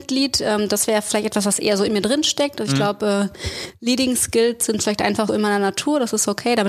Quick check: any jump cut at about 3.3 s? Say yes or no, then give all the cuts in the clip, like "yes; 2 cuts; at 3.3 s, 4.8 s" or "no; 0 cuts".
no; 1 cut; at 5.3 s